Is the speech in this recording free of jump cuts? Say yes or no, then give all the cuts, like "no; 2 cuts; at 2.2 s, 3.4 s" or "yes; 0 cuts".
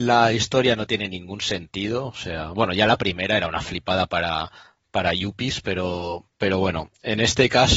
yes; 0 cuts